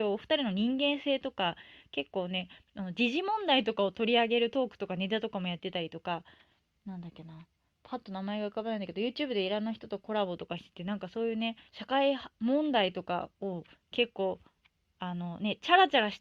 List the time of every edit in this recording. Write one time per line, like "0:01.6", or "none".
0:11.7